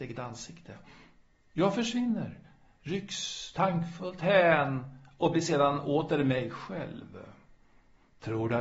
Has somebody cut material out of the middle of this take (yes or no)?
no